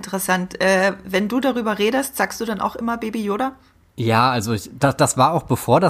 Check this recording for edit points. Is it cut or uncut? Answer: uncut